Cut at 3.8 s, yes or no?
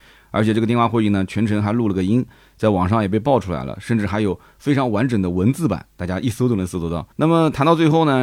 no